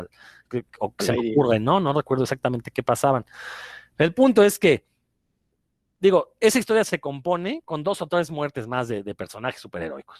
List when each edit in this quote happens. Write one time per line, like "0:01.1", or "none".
none